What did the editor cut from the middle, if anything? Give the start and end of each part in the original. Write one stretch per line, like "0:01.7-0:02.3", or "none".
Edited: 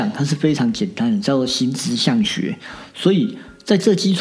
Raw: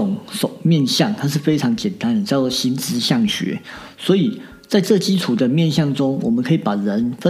none

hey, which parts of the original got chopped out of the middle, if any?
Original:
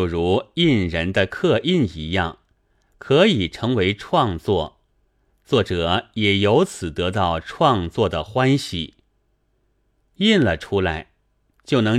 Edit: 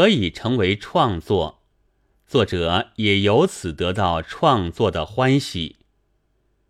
none

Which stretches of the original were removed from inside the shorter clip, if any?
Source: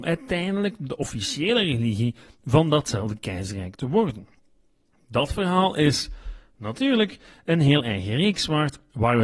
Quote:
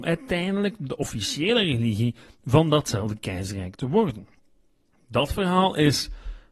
none

